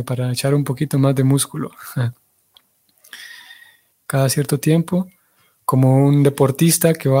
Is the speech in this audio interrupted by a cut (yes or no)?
yes